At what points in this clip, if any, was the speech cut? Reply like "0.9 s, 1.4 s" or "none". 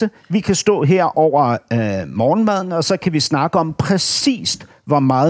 none